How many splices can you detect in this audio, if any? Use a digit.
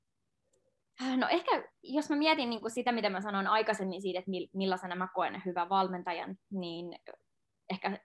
0